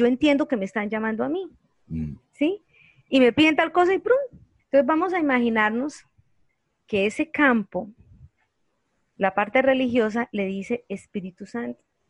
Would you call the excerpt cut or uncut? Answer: cut